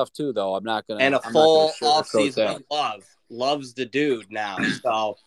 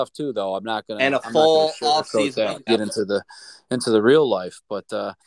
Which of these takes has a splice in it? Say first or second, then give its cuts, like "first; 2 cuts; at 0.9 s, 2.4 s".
second; 1 cut; at 2.7 s